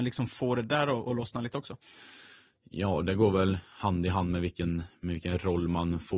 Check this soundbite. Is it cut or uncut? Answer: uncut